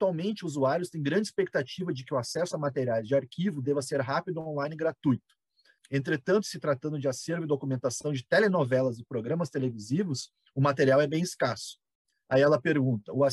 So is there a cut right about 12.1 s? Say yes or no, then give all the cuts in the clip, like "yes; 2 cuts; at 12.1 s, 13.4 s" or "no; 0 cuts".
yes; 2 cuts; at 5.8 s, 12.1 s